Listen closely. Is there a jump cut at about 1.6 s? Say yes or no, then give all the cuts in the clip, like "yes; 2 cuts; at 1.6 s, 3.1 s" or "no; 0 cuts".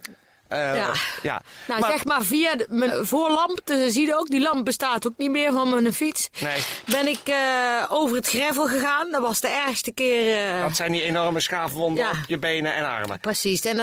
no; 1 cut; at 2.9 s